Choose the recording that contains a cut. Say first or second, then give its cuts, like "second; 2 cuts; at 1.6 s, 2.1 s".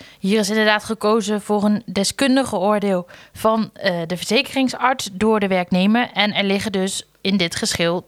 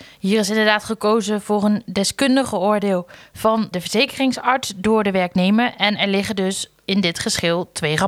second; 1 cut; at 3.7 s